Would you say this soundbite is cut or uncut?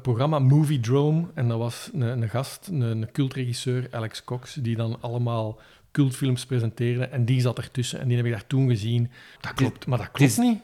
cut